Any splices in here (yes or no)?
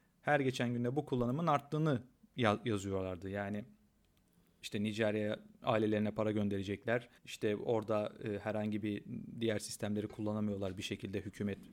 yes